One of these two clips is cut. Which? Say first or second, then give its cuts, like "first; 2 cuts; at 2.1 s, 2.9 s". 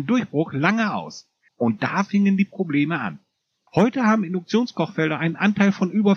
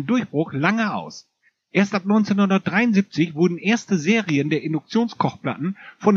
first; 2 cuts; at 1.5 s, 3.7 s